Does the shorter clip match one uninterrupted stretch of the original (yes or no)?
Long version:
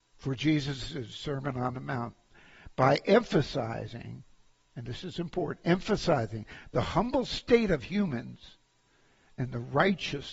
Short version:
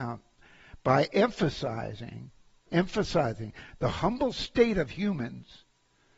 no